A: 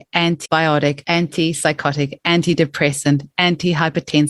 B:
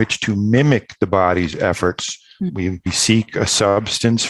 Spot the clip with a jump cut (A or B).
B